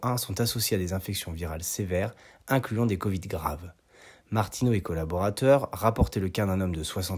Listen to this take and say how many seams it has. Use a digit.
0